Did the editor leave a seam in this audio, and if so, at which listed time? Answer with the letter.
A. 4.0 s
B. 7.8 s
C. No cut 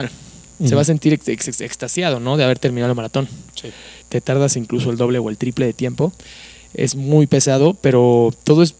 A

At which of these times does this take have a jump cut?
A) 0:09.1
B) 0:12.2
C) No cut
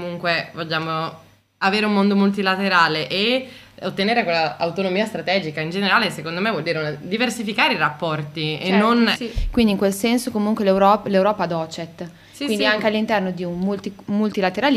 A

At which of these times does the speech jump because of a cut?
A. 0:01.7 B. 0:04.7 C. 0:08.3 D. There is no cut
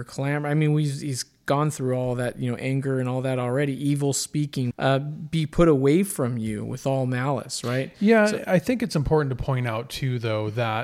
B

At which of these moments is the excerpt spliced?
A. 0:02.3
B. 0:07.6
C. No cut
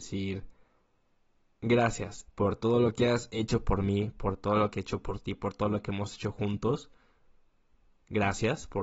A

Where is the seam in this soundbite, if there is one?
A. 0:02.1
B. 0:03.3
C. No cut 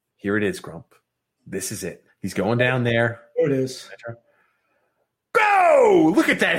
A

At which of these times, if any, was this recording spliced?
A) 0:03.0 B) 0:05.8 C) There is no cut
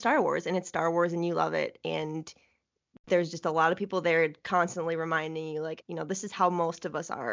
B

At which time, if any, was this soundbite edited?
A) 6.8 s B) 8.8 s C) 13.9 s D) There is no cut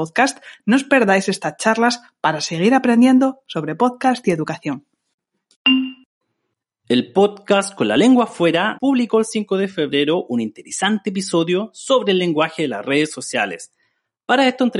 B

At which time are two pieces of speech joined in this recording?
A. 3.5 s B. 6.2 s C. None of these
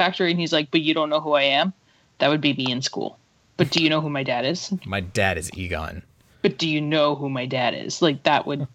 C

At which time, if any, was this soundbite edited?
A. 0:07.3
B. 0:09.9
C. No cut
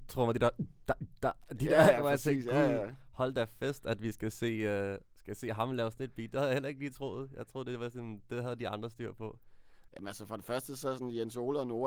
B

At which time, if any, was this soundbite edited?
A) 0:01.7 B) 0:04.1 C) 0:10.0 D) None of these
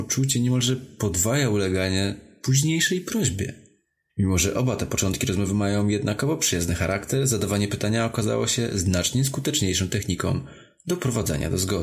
B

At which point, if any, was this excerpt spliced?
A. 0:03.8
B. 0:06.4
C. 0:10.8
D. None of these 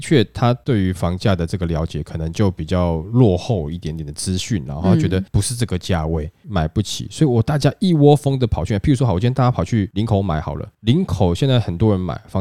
B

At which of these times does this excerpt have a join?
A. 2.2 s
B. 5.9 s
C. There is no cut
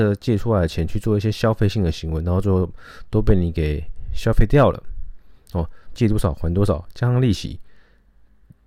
B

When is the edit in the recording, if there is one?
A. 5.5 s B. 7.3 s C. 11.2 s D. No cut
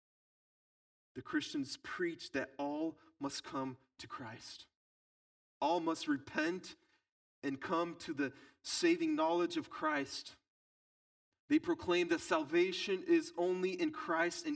A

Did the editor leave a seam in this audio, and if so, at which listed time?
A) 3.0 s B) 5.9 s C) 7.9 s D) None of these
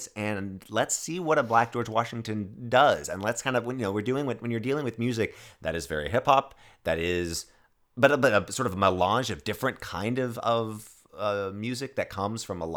D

